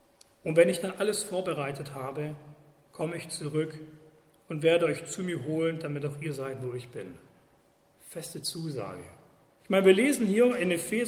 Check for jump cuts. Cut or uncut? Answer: cut